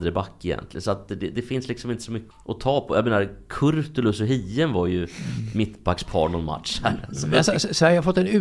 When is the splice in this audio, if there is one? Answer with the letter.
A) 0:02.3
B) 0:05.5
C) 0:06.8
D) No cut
A